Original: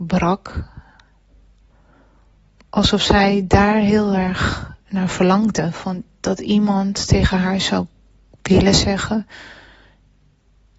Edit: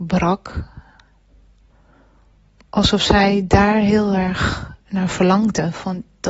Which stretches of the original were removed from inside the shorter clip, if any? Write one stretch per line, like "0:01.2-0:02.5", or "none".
none

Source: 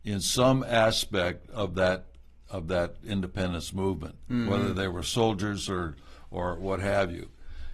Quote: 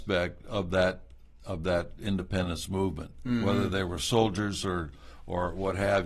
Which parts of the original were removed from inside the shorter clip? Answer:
none

